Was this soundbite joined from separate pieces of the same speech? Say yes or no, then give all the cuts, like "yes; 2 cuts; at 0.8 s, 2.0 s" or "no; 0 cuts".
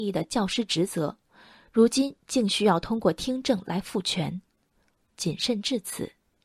yes; 1 cut; at 5.0 s